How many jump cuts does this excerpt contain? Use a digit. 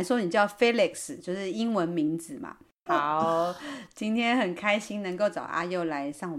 1